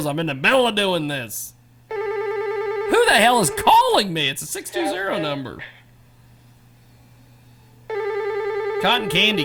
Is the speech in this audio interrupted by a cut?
no; 0 cuts

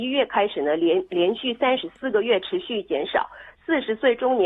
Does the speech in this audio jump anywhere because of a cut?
yes; 1 cut; at 3.5 s

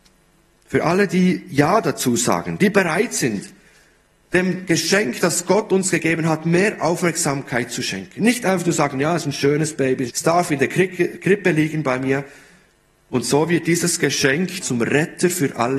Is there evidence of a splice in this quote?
yes; 3 cuts; at 10.1 s, 13.0 s, 14.6 s

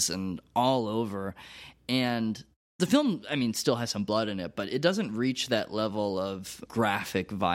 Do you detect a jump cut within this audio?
yes; 1 cut; at 6.7 s

